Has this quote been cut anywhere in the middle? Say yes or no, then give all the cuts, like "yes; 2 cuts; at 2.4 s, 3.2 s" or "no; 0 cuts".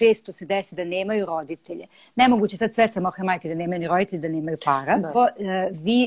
yes; 1 cut; at 5.1 s